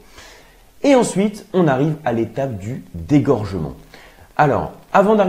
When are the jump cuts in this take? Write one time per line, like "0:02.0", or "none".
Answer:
none